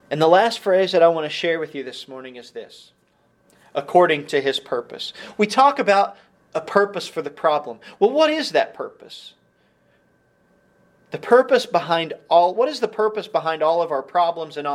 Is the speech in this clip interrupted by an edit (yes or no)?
no